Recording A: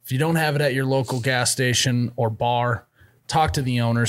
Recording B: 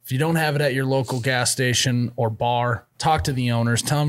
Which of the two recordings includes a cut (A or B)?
B